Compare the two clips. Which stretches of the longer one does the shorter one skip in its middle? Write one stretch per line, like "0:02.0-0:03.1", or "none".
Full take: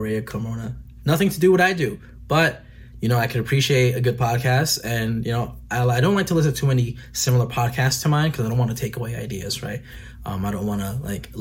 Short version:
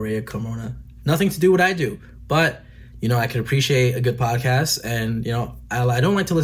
none